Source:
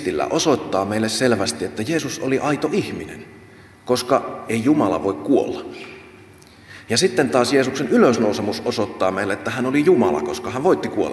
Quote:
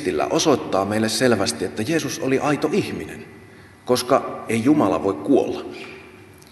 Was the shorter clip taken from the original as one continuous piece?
yes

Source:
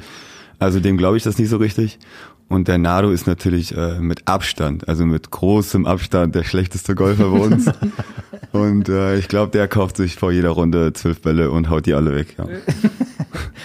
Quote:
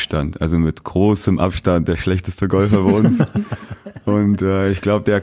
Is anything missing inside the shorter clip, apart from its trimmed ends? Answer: no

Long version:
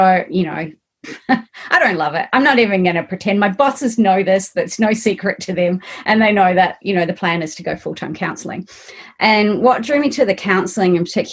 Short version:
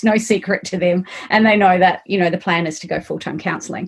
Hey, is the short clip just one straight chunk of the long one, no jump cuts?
yes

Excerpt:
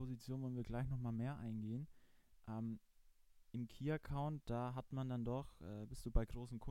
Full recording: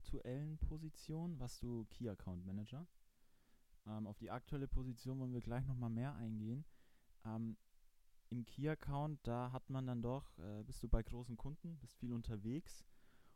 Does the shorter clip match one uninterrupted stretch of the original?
yes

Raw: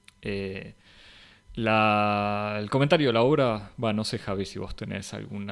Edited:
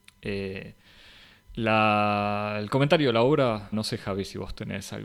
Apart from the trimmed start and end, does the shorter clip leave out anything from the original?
yes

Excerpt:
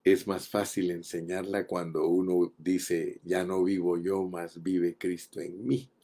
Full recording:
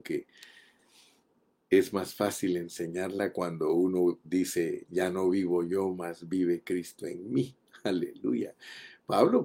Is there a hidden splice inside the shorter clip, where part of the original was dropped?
no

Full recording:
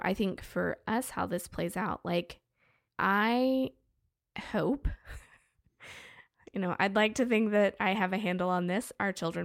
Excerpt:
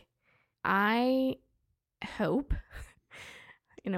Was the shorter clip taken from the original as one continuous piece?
no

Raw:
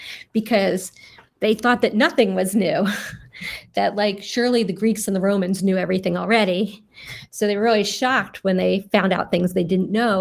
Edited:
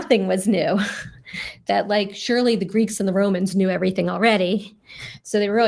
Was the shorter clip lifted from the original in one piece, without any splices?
yes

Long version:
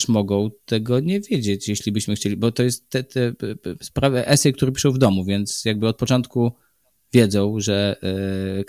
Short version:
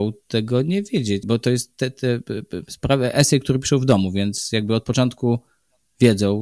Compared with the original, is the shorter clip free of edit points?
no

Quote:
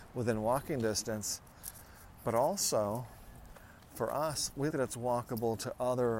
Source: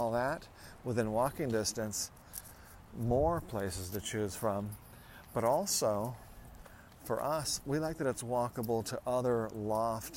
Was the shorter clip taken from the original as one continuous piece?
no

